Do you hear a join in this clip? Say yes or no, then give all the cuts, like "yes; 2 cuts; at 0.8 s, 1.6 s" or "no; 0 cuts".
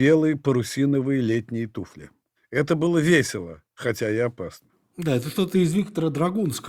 yes; 1 cut; at 2.4 s